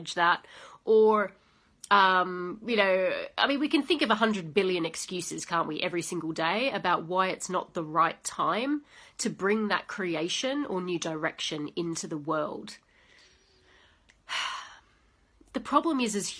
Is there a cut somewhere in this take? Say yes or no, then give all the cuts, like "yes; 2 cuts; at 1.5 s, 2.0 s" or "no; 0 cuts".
no; 0 cuts